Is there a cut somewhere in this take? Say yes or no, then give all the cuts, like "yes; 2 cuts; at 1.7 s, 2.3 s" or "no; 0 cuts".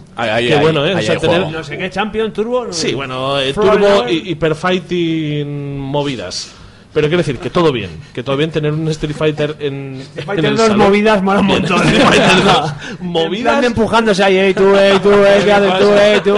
no; 0 cuts